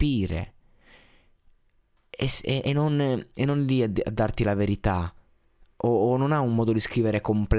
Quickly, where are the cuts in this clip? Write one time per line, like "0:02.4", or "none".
none